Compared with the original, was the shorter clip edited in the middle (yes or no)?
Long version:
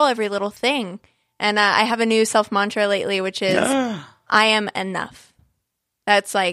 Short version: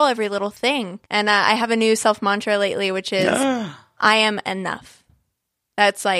yes